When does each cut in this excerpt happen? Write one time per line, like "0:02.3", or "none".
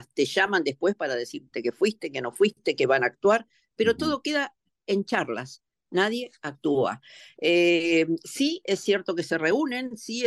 none